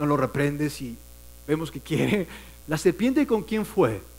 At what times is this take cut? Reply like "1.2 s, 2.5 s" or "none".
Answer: 2.6 s